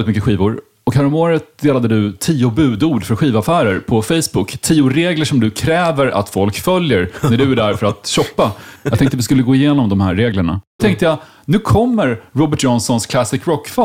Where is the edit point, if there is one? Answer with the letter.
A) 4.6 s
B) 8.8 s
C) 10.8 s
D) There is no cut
C